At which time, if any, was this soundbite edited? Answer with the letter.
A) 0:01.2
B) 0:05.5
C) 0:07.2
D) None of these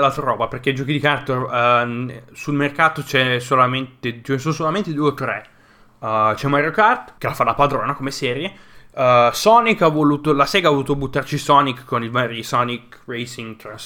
C